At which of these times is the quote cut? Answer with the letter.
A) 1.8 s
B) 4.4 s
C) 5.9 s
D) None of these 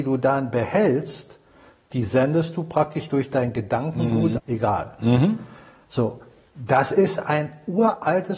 B